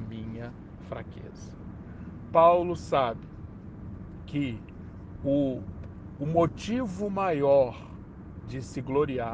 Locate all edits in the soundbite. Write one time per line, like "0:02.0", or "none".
none